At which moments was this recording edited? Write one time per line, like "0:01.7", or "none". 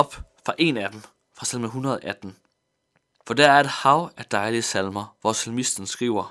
0:03.2